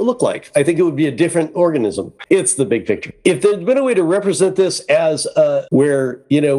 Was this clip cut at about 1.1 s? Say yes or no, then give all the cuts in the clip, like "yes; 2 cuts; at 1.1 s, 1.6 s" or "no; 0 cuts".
no; 2 cuts; at 2.3 s, 5.7 s